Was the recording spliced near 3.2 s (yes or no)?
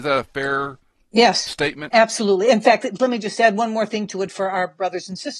no